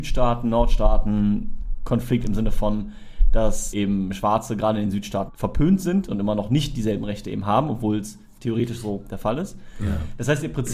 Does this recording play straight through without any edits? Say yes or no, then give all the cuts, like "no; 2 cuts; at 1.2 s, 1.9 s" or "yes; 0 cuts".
no; 2 cuts; at 3.7 s, 5.3 s